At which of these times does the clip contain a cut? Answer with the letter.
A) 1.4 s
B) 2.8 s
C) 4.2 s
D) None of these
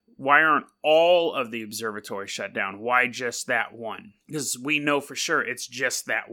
C